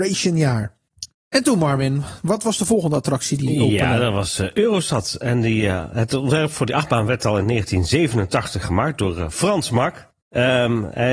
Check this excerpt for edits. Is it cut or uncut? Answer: uncut